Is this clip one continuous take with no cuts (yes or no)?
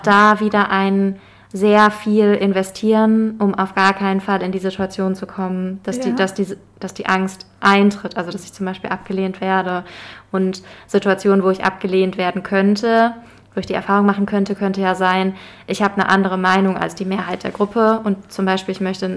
yes